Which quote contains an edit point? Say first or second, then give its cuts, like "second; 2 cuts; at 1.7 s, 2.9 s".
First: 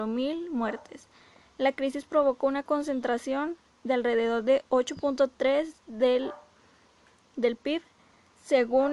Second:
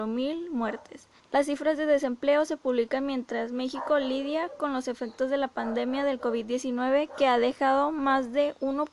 second; 1 cut; at 1.2 s